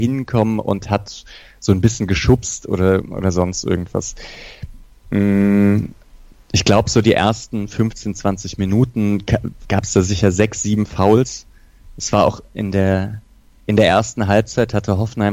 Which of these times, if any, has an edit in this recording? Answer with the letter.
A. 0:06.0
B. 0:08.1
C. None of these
C